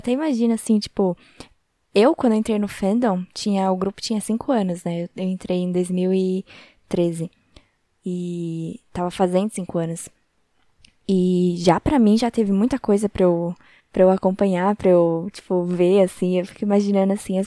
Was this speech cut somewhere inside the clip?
no; 0 cuts

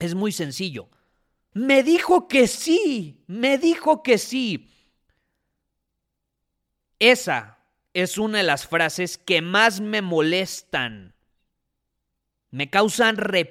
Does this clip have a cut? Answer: yes; 1 cut; at 1.5 s

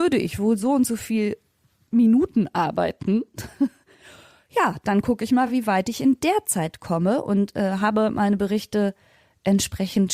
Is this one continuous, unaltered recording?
yes; 0 cuts

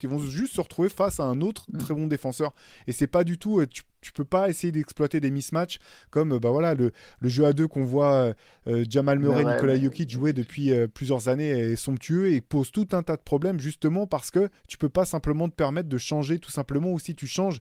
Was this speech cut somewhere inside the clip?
no; 0 cuts

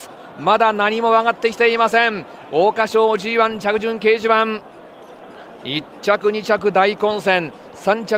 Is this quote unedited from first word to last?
yes; 0 cuts

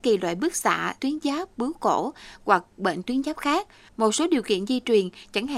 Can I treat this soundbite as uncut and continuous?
no; 1 cut; at 1.0 s

